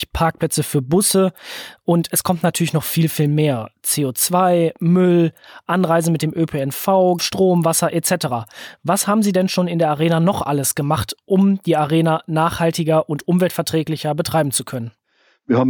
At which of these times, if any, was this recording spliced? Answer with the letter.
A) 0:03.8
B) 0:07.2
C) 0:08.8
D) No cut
B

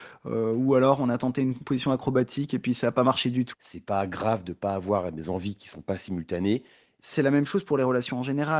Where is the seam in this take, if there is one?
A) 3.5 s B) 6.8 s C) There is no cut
A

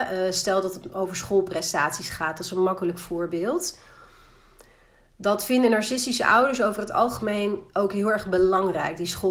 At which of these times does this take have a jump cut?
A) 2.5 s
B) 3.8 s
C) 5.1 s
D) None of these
D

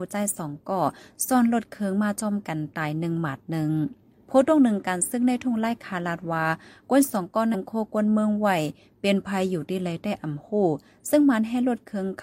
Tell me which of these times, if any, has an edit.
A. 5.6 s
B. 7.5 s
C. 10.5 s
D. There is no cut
B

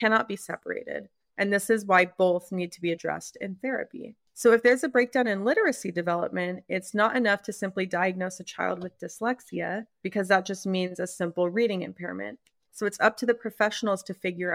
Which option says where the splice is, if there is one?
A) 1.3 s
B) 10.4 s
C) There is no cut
A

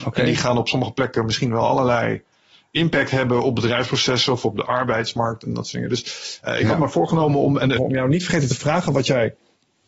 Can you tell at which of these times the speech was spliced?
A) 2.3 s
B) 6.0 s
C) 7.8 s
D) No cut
C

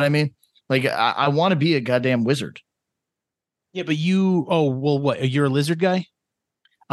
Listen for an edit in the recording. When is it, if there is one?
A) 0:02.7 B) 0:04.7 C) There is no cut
C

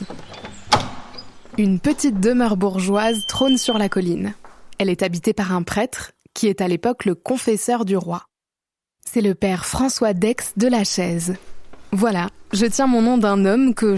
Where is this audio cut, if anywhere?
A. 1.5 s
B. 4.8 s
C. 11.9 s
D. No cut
D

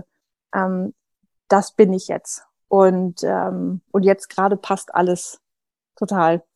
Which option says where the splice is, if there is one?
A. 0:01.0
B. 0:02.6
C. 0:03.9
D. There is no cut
C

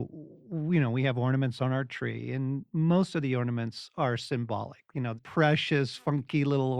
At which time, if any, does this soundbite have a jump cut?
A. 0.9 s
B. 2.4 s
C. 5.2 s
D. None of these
C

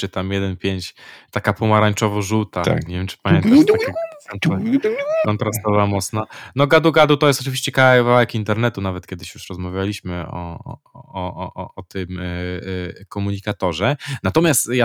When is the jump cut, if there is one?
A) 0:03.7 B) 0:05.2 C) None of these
B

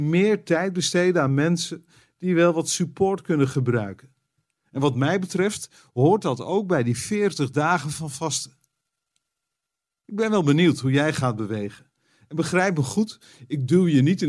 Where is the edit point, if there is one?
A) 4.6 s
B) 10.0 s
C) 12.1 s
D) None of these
D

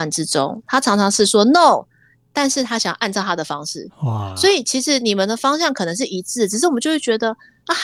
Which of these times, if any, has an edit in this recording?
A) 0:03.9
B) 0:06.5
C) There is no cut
C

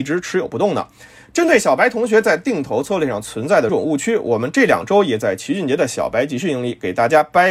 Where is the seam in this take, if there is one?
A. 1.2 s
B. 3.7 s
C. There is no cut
B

